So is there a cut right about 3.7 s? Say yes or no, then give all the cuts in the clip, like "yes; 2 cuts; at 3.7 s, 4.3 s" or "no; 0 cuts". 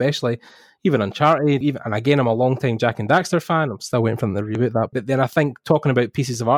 no; 2 cuts; at 1.6 s, 4.9 s